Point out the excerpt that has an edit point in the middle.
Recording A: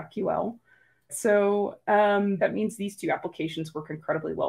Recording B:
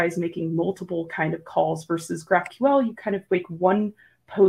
A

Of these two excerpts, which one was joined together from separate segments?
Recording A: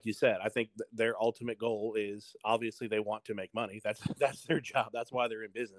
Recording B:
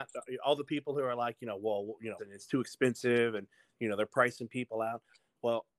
B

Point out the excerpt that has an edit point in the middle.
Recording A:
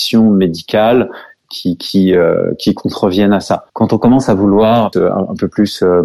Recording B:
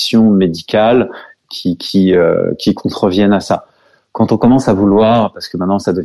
A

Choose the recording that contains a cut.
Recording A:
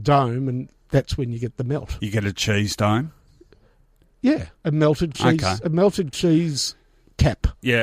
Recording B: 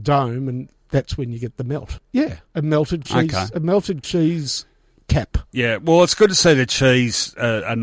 B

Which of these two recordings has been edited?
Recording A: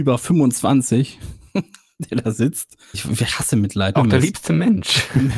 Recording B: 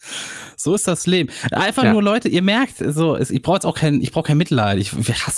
A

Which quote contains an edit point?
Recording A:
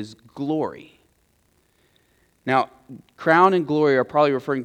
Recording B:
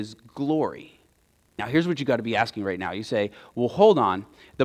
B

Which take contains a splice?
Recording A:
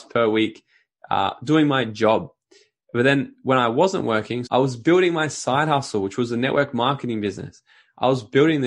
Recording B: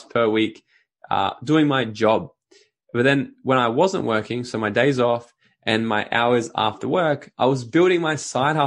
A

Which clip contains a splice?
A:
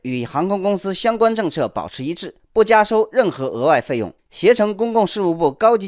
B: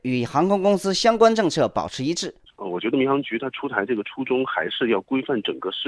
B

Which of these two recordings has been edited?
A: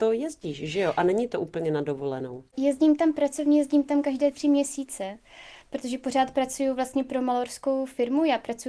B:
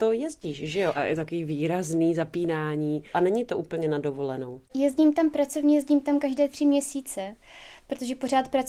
B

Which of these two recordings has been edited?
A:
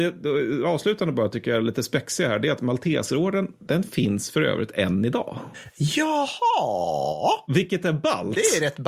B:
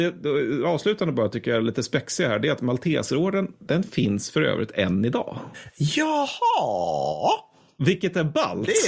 A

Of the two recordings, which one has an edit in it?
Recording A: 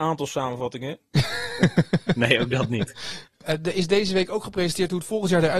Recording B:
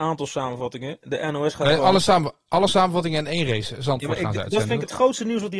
A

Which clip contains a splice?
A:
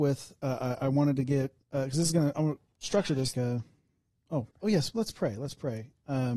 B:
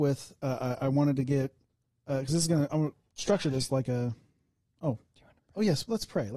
A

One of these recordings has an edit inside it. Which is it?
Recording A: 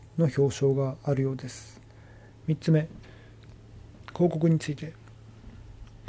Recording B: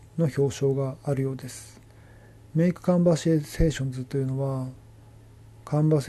A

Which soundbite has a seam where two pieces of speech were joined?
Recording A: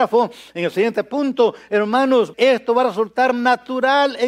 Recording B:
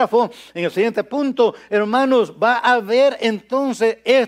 A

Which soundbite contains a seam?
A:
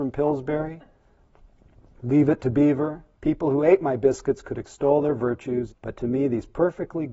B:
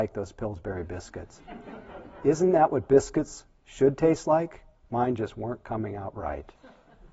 A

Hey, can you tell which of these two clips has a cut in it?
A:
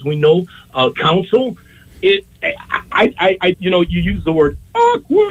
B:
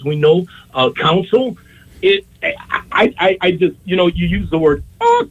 A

